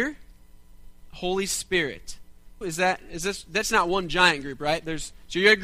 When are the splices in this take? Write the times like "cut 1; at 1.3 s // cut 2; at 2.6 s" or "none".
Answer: cut 1; at 2.6 s